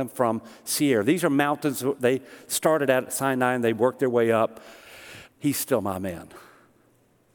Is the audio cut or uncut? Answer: cut